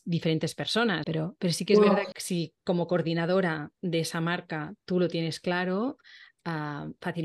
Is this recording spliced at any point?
yes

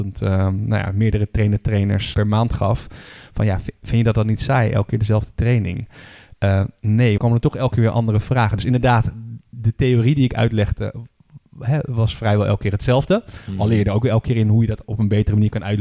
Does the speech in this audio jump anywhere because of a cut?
yes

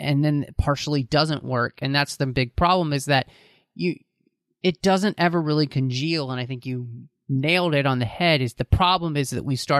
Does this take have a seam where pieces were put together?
no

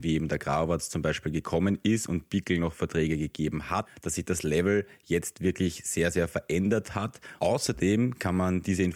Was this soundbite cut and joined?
yes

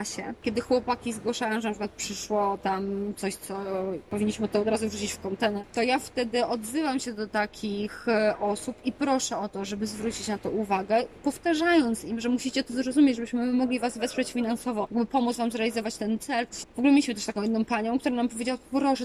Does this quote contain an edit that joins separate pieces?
yes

